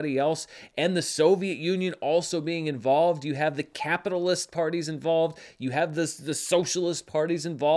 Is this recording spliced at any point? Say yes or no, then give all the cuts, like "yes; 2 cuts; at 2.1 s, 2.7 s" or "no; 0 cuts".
no; 0 cuts